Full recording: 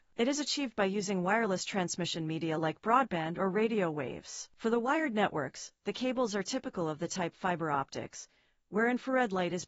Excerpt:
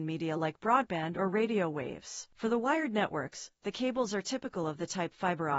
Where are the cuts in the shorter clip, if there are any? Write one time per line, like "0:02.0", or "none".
none